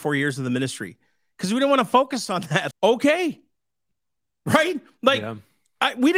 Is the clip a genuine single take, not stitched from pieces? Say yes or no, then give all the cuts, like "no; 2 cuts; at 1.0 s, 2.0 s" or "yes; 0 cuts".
no; 1 cut; at 2.7 s